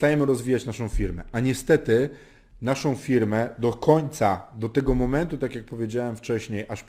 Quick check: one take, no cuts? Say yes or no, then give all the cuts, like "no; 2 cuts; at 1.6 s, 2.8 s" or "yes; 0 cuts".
yes; 0 cuts